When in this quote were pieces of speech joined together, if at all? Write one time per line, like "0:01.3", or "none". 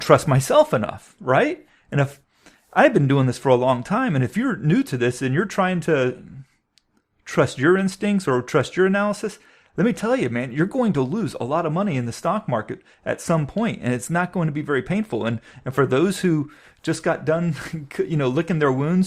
none